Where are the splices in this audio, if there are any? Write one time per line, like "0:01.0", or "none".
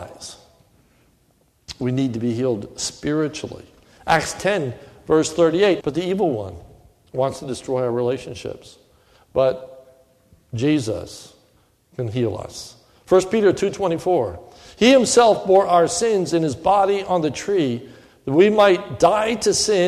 0:05.8